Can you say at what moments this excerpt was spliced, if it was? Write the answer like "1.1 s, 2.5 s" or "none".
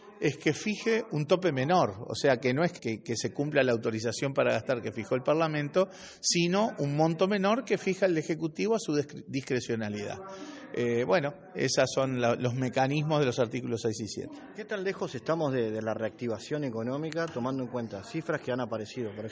2.8 s